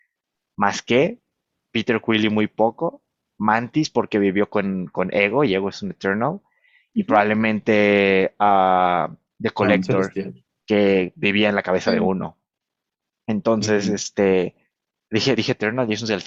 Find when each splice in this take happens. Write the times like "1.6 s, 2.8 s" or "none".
none